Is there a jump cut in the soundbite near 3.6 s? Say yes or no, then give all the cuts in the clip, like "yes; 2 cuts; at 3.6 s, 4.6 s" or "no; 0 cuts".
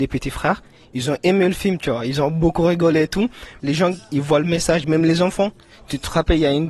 yes; 1 cut; at 3.6 s